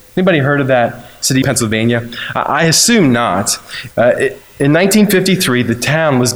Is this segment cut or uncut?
cut